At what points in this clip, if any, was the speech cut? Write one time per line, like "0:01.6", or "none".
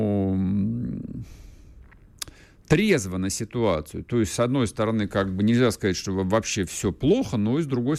none